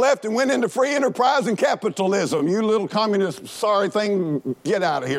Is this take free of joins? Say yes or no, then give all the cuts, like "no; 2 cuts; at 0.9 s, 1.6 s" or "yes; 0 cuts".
yes; 0 cuts